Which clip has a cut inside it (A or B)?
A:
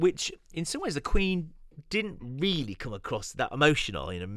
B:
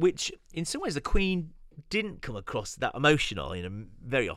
B